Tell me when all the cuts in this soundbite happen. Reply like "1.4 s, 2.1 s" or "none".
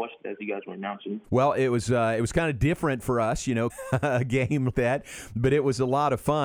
1.2 s, 3.7 s, 4.7 s